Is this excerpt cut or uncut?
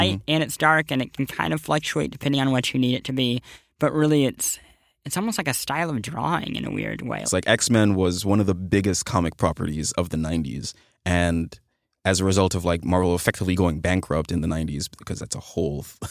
cut